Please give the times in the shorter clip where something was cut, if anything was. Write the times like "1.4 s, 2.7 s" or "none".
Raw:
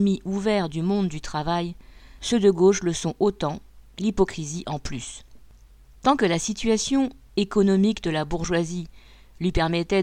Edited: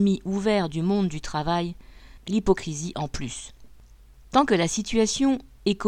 2.2 s